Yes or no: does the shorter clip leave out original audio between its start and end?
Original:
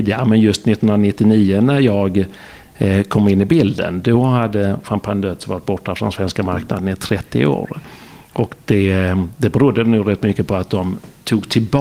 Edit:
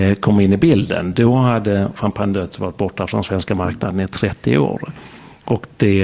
no